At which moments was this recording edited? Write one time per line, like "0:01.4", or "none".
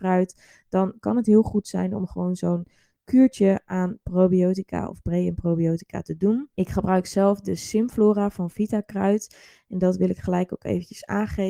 0:06.5
0:09.5

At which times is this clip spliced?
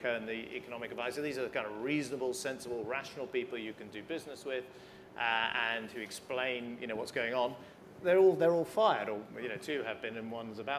none

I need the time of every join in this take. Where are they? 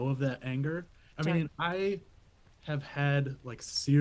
0:01.1

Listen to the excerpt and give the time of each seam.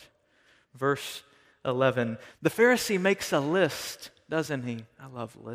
0:02.3

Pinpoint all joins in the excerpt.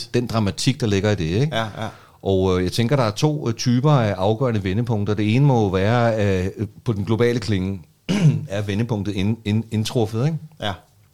none

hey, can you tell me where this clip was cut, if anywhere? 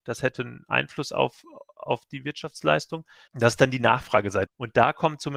0:03.3
0:04.5

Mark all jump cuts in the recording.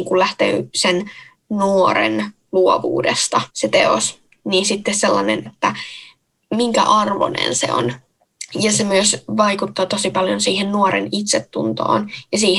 0:03.5
0:05.5

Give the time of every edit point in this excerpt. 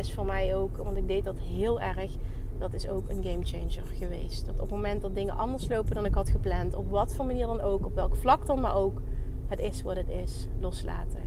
none

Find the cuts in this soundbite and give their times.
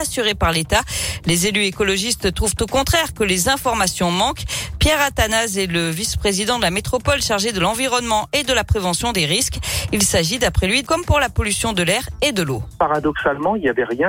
0:10.8

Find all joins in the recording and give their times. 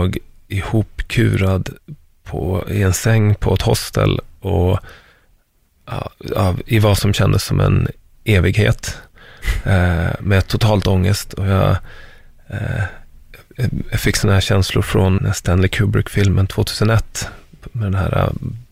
0:15.2

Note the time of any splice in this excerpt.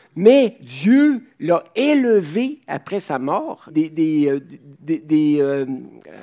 0:03.7
0:04.8

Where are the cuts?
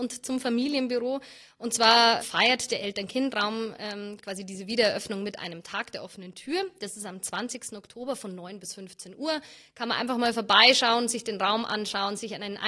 0:02.2

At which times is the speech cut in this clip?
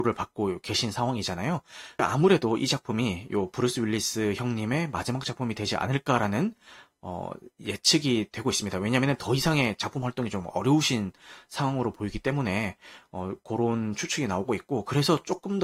none

